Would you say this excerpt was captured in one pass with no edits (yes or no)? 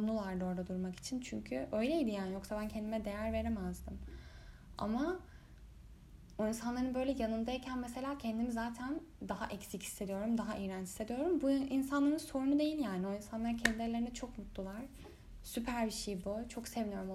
yes